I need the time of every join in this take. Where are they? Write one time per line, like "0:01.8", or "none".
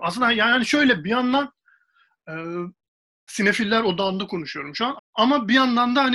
0:03.3
0:05.0